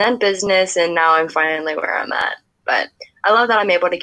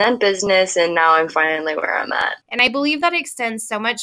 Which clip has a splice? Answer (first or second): second